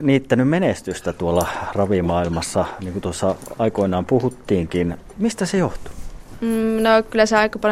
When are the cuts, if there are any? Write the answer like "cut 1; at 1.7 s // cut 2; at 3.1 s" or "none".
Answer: cut 1; at 5.1 s